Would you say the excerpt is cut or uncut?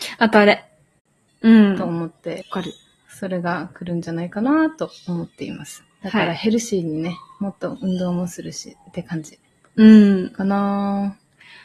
cut